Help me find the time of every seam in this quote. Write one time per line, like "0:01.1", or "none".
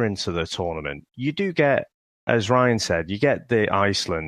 none